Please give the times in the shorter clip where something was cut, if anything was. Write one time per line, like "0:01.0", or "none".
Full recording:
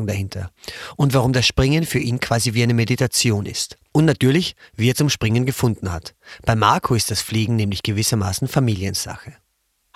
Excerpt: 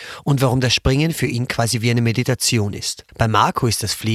0:03.1